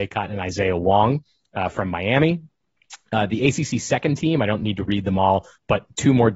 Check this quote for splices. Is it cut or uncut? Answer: uncut